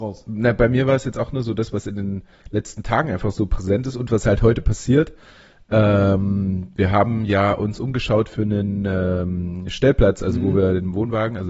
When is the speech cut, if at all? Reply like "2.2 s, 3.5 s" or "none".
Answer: none